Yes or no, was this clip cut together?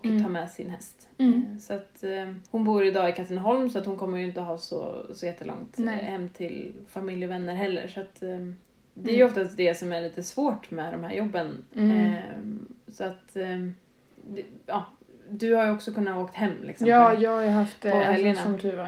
yes